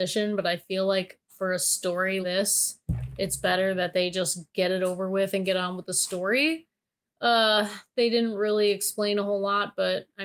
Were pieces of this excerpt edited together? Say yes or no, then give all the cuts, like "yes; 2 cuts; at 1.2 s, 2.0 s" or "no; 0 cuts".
yes; 1 cut; at 2.2 s